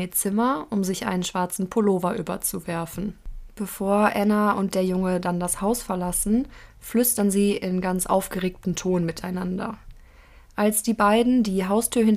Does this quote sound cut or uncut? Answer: uncut